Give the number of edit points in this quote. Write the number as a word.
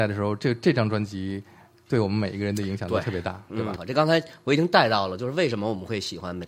one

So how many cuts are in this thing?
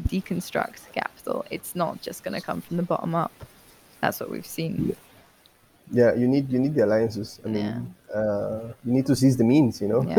zero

